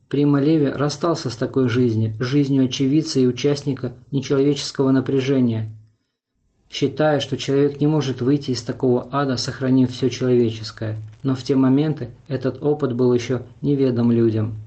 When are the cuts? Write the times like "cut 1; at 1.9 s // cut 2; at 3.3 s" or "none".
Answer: none